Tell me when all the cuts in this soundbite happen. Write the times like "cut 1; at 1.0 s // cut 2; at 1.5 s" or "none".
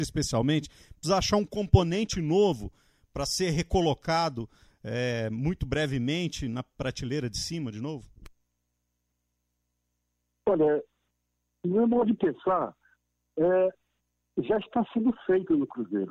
none